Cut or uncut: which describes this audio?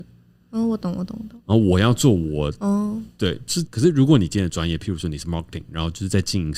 cut